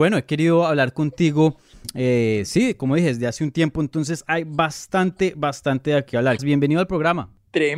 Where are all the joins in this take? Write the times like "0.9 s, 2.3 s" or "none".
6.4 s